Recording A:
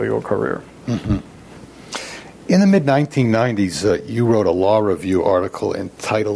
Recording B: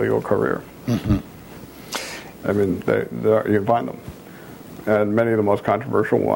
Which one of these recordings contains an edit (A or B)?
B